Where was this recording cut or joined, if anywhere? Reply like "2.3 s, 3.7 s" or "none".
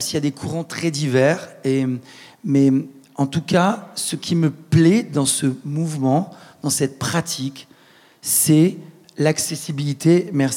none